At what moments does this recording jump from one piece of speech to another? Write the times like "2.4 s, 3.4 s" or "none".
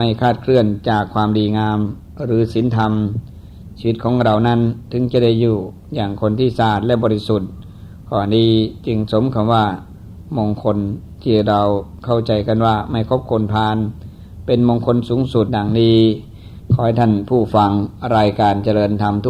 15.5 s